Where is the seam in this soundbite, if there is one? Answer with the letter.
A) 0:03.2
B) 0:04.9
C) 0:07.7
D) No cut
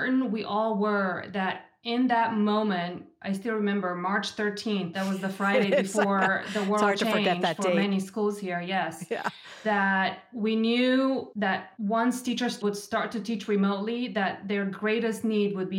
D